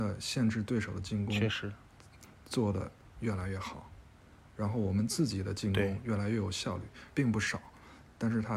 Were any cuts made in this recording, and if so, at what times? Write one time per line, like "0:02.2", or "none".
0:07.1